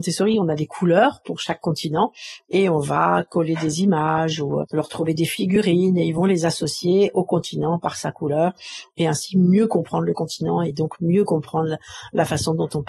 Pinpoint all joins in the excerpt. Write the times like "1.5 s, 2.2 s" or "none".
4.6 s

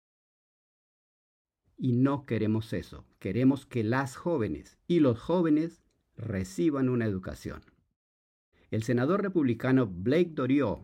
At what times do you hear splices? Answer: 1.6 s, 8.5 s

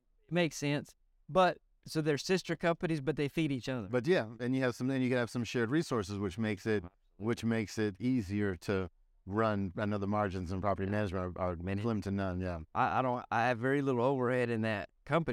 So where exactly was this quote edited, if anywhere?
none

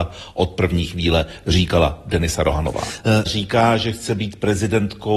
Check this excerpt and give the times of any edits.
3.3 s

